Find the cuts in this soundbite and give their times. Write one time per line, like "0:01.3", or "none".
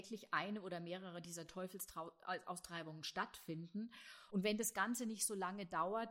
0:04.3